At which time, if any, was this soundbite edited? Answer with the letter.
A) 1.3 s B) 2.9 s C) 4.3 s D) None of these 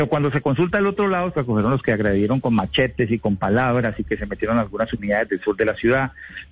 A